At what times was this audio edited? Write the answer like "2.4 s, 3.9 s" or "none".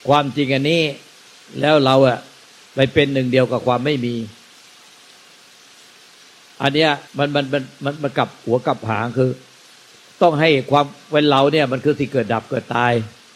7.1 s